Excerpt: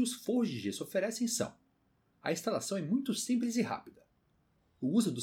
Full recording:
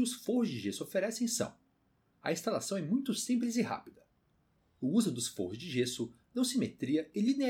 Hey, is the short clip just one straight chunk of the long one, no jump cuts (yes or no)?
yes